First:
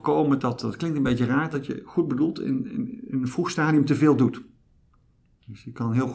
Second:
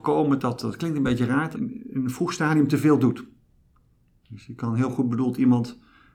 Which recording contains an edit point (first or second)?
second